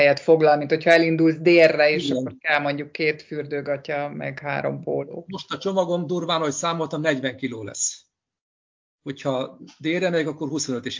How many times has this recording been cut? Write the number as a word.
zero